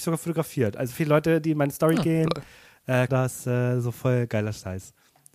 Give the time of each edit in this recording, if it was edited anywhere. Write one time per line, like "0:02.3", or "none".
0:03.1